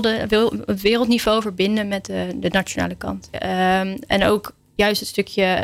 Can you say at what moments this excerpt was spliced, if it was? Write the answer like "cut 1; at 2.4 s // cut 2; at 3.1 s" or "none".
cut 1; at 3.3 s